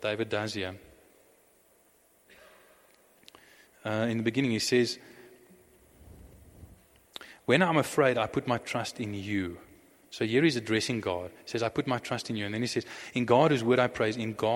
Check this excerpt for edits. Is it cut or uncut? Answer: uncut